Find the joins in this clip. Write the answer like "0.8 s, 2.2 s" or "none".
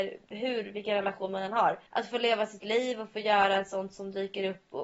1.9 s